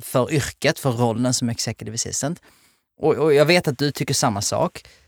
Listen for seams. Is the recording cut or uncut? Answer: uncut